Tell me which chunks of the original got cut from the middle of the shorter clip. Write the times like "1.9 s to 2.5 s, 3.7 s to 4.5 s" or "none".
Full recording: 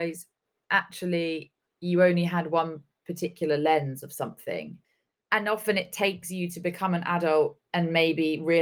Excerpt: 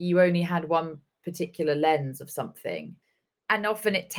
none